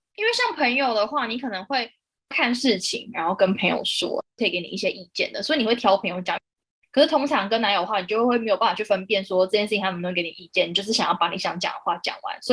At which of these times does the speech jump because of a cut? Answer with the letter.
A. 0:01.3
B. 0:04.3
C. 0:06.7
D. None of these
D